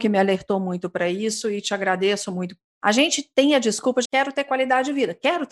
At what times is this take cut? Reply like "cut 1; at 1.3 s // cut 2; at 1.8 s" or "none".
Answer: cut 1; at 4.0 s